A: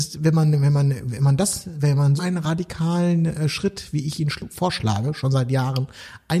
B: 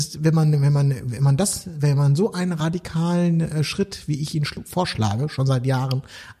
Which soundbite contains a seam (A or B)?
A